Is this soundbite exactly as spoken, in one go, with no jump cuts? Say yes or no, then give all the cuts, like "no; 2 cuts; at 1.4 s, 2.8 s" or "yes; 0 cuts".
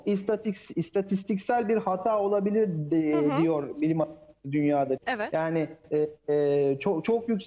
no; 1 cut; at 5.0 s